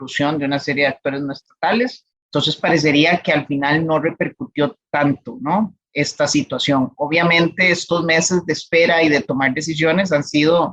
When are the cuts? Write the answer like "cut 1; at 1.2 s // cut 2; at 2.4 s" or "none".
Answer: cut 1; at 2.2 s